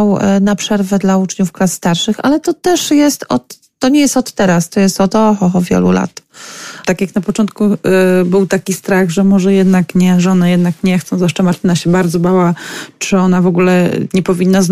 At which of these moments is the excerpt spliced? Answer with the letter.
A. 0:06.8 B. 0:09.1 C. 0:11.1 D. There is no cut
A